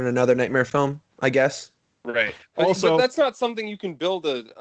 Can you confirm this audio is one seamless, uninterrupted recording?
yes; 0 cuts

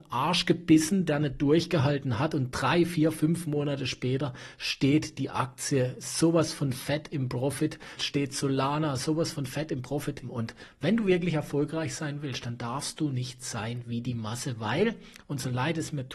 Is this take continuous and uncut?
no; 2 cuts; at 8.0 s, 10.2 s

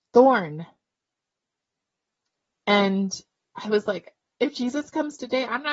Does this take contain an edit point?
no; 0 cuts

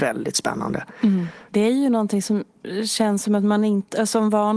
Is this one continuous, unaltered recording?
no; 1 cut; at 1.5 s

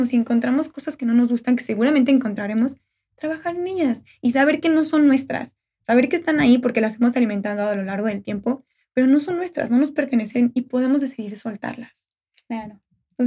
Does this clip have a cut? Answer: no; 0 cuts

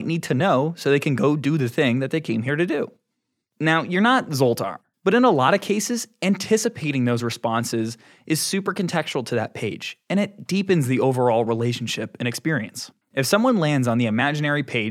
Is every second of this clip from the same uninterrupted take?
no; 2 cuts; at 4.9 s, 13.0 s

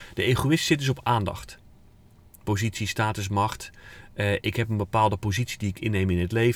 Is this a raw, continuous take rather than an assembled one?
yes; 0 cuts

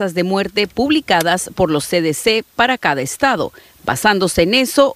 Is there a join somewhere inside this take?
no; 0 cuts

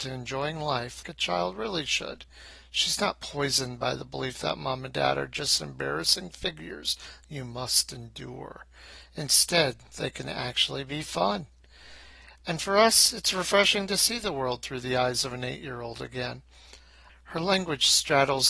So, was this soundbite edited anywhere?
yes; 2 cuts; at 1.0 s, 17.1 s

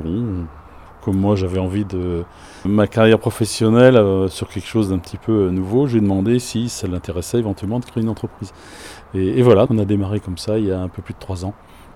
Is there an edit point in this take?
yes; 2 cuts; at 2.7 s, 9.7 s

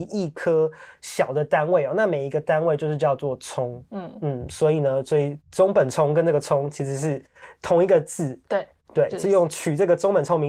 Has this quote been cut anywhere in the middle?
no; 0 cuts

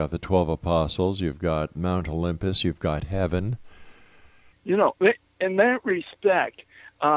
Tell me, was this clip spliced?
yes; 1 cut; at 4.5 s

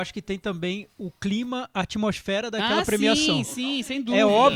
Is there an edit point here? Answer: no; 0 cuts

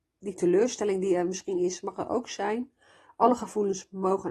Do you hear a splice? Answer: no; 0 cuts

